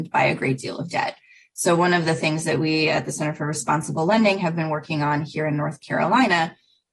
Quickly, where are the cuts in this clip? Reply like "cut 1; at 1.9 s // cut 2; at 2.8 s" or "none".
none